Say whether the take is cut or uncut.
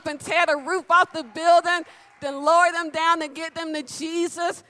uncut